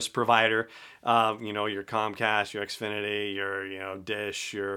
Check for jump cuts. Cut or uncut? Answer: uncut